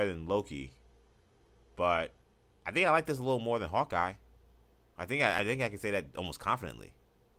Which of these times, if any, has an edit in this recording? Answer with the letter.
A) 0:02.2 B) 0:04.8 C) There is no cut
C